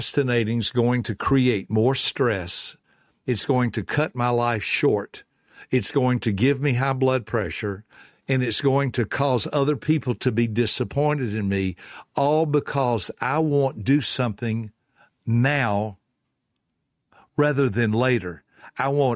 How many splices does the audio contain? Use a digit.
0